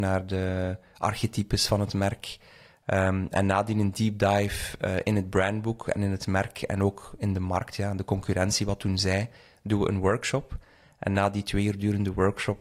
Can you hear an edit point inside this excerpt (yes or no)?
no